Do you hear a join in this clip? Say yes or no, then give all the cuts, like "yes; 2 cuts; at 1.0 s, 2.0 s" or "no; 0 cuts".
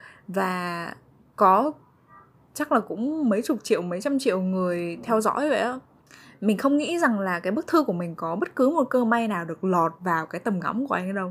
no; 0 cuts